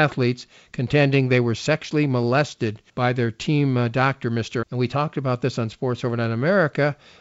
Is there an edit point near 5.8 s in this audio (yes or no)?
no